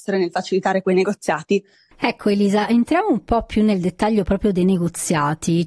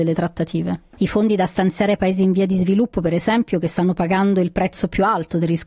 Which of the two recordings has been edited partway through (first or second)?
second